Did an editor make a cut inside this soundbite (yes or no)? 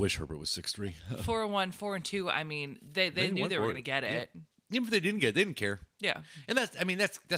no